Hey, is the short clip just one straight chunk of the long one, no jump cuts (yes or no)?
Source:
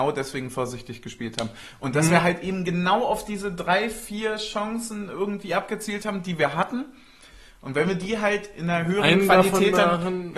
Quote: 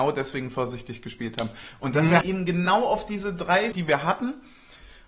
no